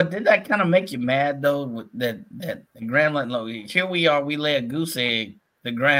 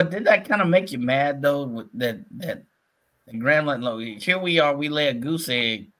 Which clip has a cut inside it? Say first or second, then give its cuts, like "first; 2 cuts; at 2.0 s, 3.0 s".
first; 1 cut; at 2.7 s